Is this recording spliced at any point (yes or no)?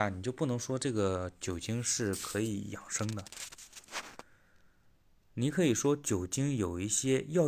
no